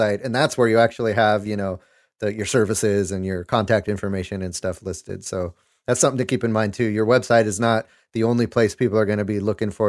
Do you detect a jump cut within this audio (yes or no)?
no